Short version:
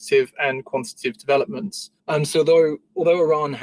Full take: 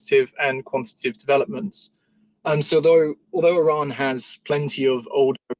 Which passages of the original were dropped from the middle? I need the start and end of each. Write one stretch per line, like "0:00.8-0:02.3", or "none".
0:02.0-0:02.4